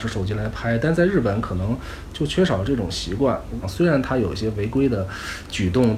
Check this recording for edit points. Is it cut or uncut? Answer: cut